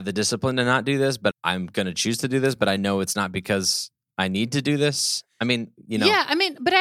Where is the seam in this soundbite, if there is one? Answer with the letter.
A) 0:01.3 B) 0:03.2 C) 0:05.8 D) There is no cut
A